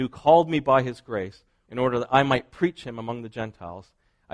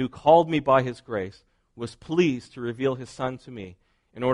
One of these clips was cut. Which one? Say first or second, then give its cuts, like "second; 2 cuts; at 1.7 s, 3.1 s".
first; 1 cut; at 1.6 s